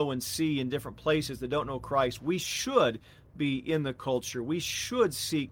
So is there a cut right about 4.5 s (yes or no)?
no